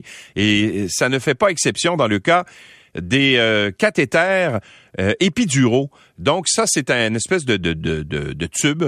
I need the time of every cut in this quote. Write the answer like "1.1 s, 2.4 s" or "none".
none